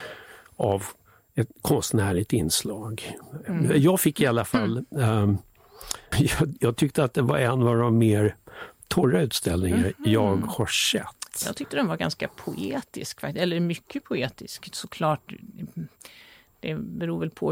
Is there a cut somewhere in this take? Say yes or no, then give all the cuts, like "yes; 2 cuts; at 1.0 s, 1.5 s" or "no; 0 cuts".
yes; 1 cut; at 6.1 s